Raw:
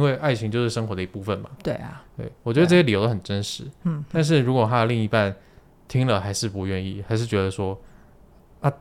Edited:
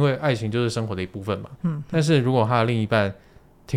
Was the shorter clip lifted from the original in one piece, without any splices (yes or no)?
no